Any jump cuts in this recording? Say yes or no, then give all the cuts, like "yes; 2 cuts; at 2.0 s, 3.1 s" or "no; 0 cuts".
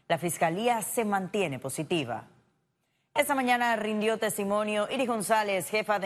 no; 0 cuts